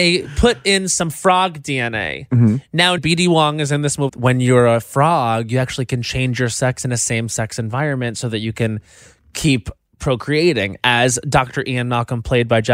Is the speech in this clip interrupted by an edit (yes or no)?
yes